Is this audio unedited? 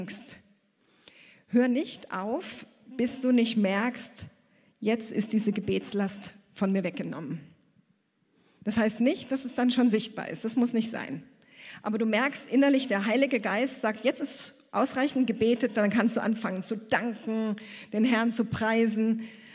yes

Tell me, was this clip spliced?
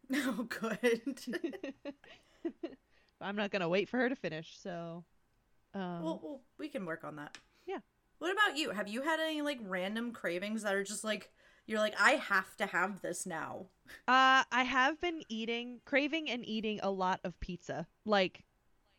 no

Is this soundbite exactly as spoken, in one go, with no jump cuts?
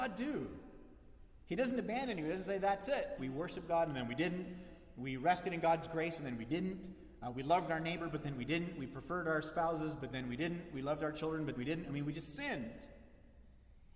no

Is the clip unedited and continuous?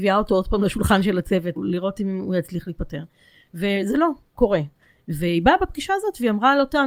no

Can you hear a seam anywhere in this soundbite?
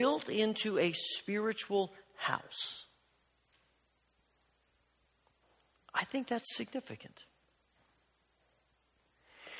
no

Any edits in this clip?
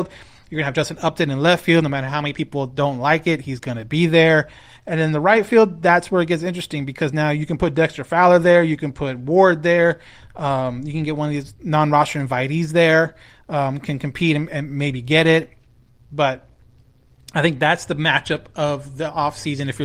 no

